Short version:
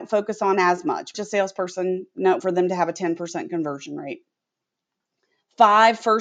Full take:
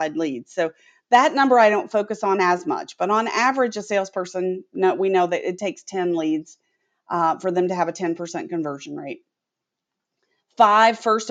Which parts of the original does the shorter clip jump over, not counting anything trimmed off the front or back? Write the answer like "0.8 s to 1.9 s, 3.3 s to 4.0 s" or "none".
3.0 s to 3.7 s, 5.0 s to 7.4 s

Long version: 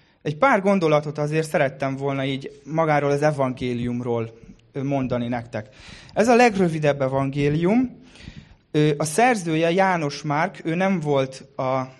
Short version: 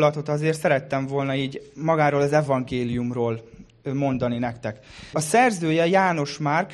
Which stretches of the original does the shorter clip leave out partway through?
6.0 s to 9.0 s

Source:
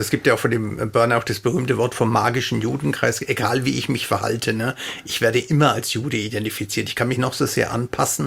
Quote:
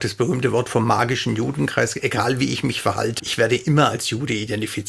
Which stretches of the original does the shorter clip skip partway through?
4.4 s to 5.0 s

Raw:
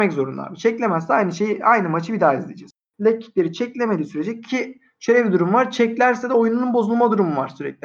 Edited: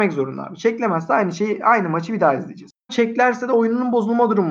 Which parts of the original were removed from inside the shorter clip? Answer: 2.9 s to 5.7 s

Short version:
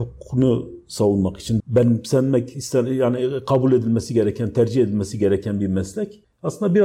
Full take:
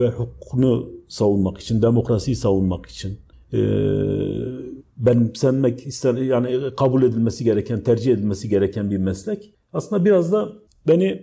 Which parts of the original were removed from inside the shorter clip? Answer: 1.8 s to 4.9 s

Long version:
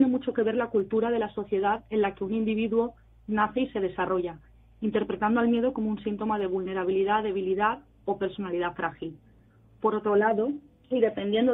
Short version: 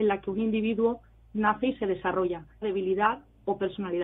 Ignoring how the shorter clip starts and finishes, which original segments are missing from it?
4.6 s to 7.2 s

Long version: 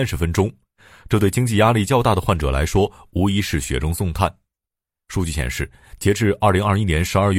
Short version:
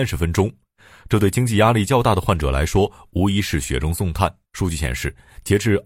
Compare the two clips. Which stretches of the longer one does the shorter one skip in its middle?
4.5 s to 5.0 s

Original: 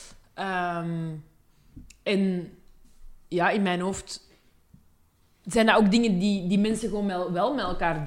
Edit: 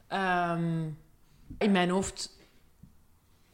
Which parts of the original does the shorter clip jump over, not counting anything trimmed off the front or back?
1.9 s to 3.5 s

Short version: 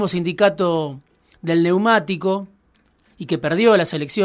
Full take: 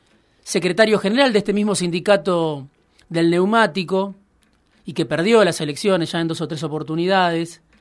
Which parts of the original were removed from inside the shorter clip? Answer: none

